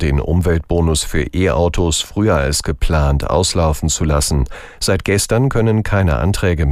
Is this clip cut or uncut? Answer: uncut